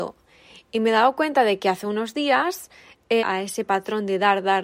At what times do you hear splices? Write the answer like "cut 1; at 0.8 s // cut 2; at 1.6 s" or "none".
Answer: cut 1; at 3.2 s